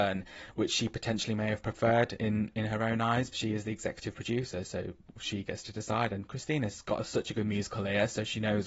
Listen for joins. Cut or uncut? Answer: cut